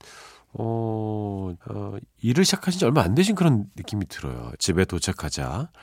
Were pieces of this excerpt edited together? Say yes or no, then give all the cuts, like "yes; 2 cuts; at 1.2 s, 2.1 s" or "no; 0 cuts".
yes; 2 cuts; at 1.6 s, 4.6 s